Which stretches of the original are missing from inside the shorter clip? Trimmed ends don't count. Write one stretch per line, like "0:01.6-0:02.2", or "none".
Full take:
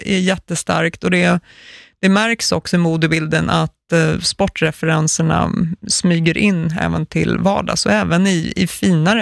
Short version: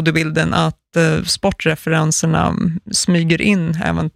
none